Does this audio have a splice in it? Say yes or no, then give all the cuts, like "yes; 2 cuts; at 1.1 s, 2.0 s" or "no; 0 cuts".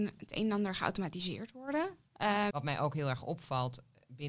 yes; 1 cut; at 2.5 s